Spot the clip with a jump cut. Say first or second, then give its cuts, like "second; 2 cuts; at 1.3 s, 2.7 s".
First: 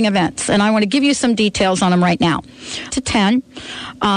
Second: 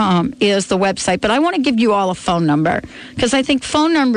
first; 1 cut; at 2.9 s